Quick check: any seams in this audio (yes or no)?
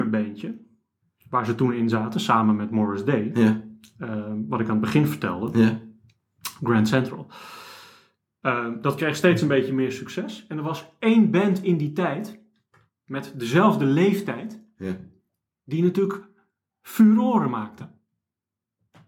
no